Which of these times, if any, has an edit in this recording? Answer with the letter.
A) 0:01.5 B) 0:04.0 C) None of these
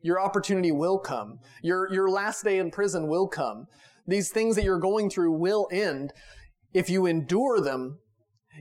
C